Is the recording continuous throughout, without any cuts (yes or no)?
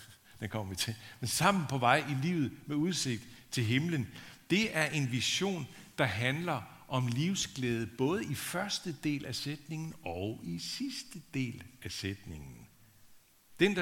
yes